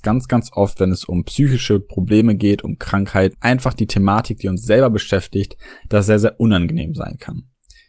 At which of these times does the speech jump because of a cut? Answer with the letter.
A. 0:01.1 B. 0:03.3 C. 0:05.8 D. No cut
B